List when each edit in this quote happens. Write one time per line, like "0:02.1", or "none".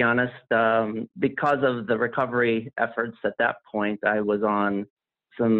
0:01.1